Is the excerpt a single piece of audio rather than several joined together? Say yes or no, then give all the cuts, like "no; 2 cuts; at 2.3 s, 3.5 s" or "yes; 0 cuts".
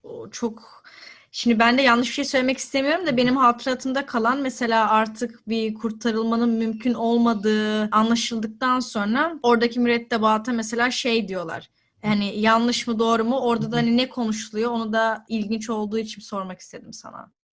no; 1 cut; at 11.9 s